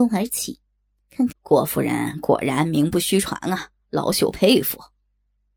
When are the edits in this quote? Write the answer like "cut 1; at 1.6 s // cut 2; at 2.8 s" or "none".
cut 1; at 1.3 s // cut 2; at 3.8 s